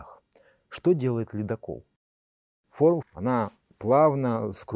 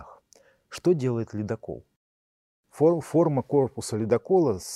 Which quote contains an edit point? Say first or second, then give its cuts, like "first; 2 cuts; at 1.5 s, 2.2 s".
first; 1 cut; at 3.0 s